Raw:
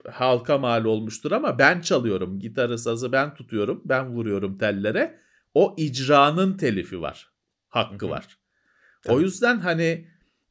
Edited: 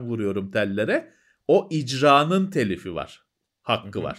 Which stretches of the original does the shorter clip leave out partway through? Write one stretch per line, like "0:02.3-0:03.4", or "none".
none